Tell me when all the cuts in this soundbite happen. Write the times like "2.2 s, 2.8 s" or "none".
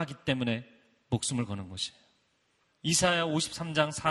2.7 s